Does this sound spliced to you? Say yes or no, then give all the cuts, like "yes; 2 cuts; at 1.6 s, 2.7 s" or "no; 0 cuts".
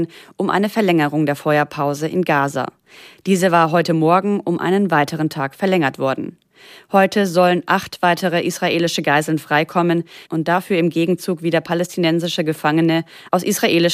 no; 0 cuts